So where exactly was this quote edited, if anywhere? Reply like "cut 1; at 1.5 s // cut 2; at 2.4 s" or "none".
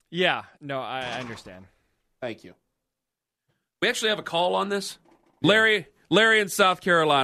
cut 1; at 5.4 s